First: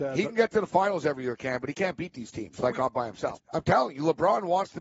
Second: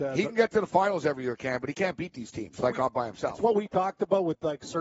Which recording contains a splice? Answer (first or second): first